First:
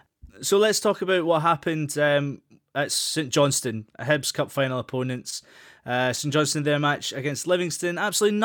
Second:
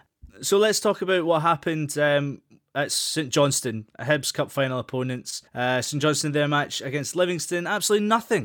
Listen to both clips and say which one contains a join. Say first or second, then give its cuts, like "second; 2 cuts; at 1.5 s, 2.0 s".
second; 1 cut; at 5.5 s